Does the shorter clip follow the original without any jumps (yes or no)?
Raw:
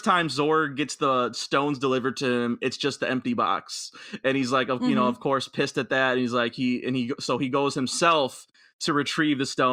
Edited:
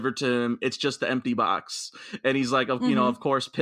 yes